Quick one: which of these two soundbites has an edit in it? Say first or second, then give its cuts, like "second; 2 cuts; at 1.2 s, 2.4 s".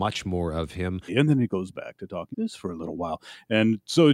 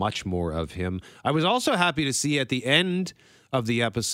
first; 2 cuts; at 1.1 s, 2.3 s